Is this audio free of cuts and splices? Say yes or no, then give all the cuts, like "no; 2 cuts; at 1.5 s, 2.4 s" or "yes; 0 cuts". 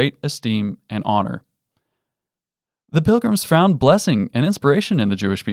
yes; 0 cuts